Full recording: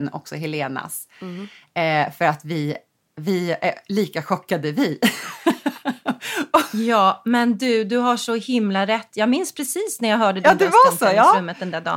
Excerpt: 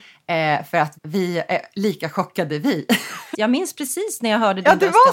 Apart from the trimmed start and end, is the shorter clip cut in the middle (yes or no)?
yes